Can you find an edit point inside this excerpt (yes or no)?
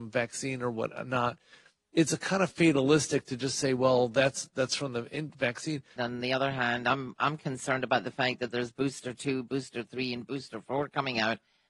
yes